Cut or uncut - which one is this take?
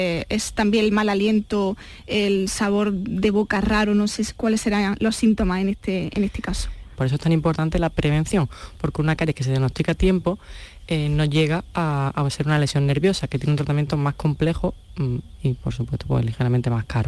cut